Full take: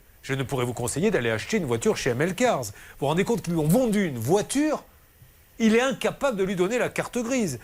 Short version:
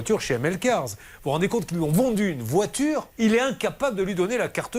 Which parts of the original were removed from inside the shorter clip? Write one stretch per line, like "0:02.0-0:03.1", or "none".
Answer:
0:04.9-0:05.5